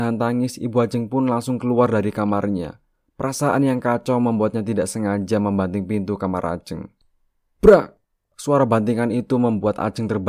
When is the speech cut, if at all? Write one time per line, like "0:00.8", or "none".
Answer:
none